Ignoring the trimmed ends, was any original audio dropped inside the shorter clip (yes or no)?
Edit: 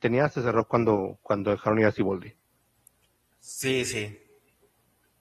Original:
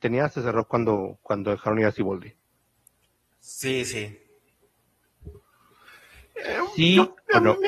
no